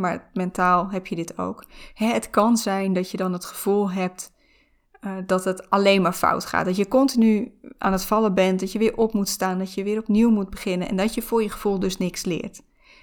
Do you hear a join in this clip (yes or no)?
no